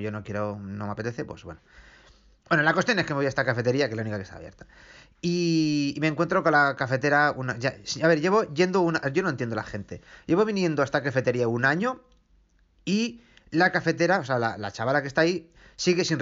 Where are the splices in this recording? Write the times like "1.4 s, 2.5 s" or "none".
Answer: none